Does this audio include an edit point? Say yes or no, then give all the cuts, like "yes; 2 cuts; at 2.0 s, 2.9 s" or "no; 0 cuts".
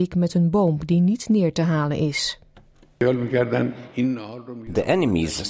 no; 0 cuts